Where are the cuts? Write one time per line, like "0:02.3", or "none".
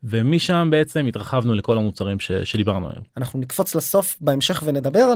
0:03.1